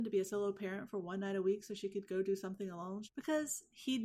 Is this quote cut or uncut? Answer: cut